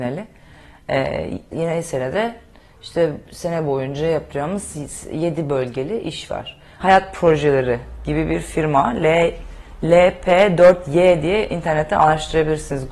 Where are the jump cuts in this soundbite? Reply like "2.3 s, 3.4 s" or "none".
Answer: 1.5 s, 6.8 s